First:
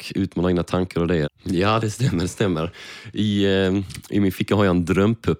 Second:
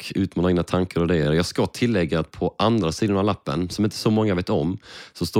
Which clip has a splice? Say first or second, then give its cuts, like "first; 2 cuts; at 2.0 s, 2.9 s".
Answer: first; 1 cut; at 1.2 s